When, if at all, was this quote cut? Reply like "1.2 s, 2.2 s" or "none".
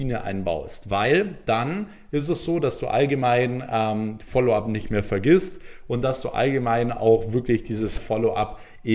8.0 s